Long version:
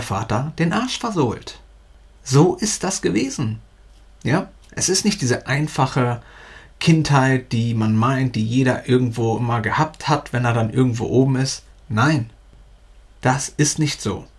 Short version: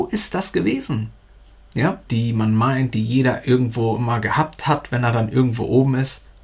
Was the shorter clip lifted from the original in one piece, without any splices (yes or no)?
no